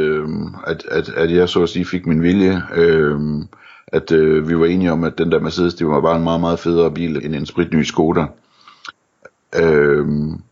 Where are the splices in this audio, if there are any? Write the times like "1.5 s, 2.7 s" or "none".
7.2 s